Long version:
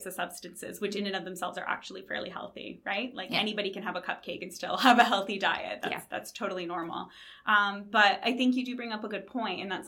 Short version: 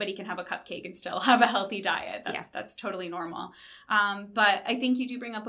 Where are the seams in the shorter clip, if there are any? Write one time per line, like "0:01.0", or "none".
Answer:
none